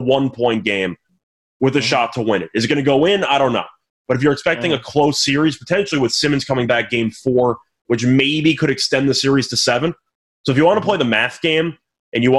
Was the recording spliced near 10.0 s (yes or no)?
no